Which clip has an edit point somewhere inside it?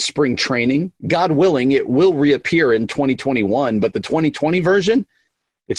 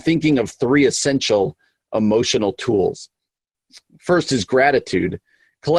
first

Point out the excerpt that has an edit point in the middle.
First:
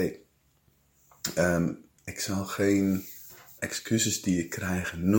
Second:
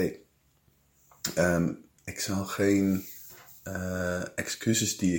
first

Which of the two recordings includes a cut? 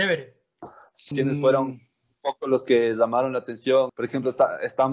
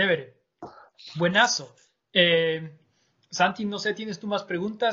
first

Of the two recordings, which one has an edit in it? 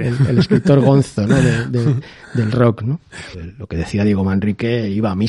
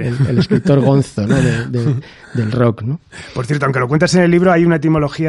first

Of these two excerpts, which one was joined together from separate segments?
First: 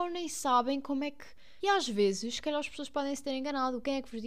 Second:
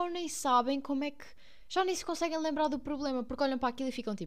first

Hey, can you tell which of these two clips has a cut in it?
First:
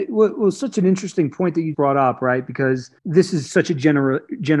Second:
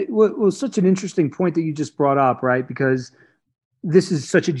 first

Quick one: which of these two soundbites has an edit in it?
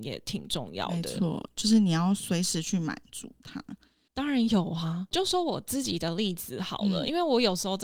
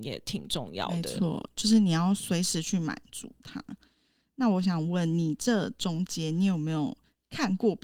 first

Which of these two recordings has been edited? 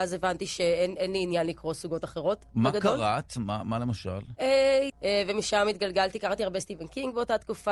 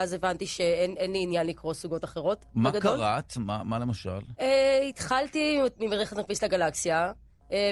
first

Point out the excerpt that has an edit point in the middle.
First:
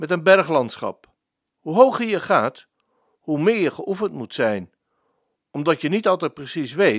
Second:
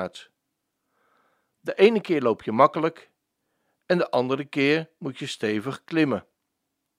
first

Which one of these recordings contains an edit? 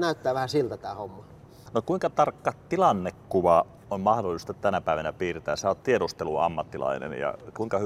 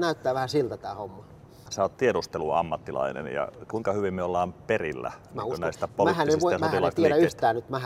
second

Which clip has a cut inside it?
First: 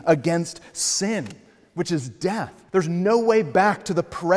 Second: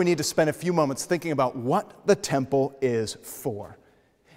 first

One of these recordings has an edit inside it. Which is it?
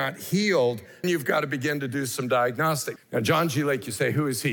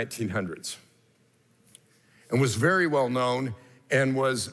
first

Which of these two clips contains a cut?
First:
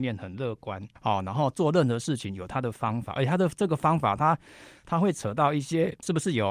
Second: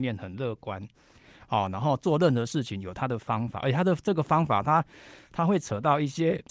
first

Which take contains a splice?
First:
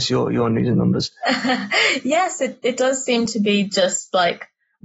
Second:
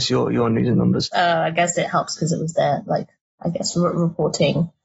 second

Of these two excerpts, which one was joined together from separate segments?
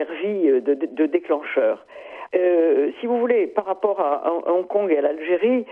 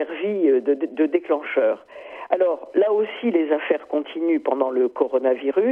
first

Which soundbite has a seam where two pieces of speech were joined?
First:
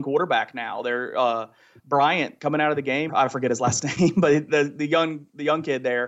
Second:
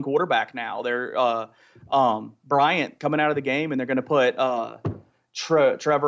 first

